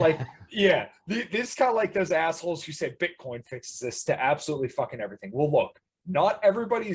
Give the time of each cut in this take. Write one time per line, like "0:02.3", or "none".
none